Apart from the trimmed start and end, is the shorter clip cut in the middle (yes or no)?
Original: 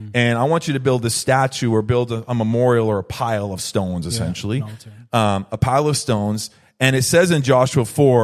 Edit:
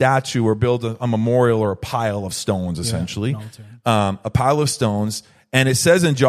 no